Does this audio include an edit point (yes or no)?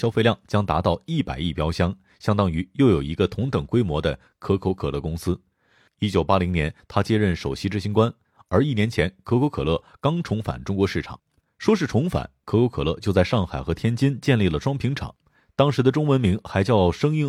yes